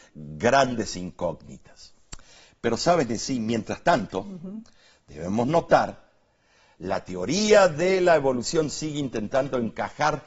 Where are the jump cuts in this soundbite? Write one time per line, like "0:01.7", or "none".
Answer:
none